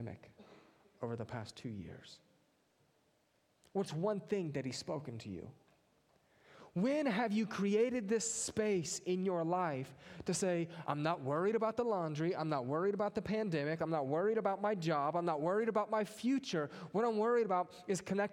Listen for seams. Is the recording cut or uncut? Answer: uncut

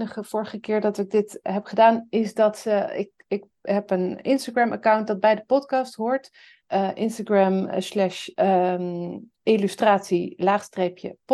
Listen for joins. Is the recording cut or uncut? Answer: uncut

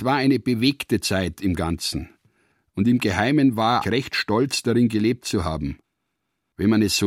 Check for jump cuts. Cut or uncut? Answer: cut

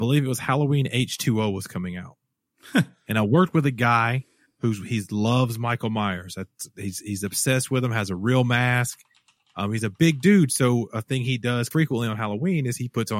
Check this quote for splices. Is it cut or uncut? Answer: cut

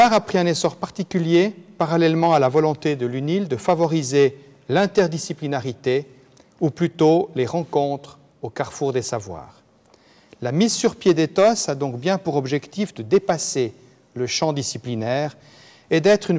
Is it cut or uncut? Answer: uncut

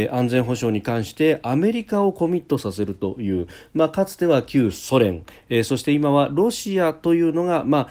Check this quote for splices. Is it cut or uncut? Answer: uncut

